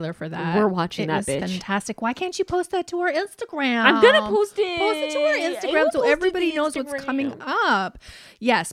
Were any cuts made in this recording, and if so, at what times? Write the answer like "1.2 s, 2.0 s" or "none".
none